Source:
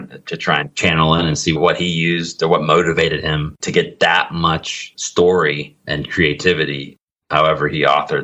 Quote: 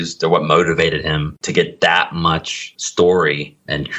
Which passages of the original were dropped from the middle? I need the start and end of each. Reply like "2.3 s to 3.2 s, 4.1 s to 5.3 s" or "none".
none